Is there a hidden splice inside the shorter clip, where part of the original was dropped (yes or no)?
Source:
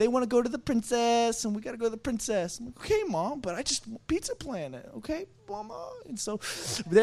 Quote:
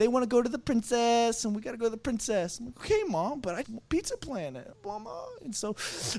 yes